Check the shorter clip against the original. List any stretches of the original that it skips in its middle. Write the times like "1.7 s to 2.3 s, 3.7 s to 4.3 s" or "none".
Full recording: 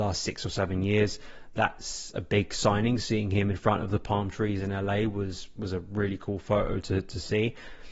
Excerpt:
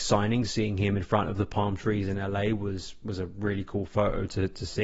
none